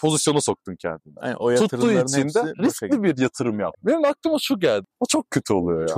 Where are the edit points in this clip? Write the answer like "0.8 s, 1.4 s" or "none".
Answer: 3.7 s, 4.9 s